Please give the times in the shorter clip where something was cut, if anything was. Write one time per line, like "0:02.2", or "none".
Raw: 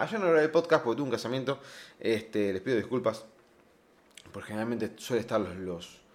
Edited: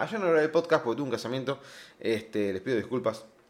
none